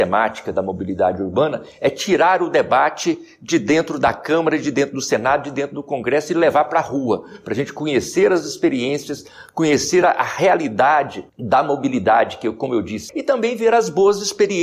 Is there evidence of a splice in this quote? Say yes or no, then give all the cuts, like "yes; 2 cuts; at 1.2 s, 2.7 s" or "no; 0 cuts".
yes; 2 cuts; at 11.3 s, 13.1 s